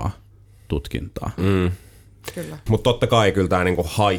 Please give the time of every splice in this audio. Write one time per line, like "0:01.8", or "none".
0:01.4
0:02.7